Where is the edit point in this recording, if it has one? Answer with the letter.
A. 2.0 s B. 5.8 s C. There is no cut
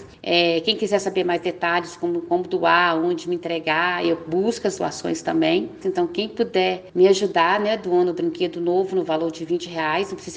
B